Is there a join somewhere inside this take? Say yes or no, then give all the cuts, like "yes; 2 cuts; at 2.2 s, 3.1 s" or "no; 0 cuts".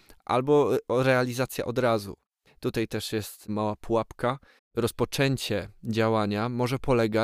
yes; 2 cuts; at 2.5 s, 4.6 s